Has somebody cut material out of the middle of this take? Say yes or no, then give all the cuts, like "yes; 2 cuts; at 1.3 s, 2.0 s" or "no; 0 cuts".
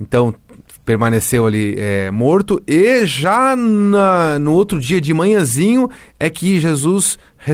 no; 0 cuts